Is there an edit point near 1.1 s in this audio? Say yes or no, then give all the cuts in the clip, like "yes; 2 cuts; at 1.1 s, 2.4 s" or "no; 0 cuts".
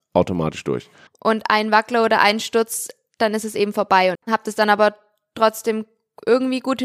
yes; 2 cuts; at 1.1 s, 4.1 s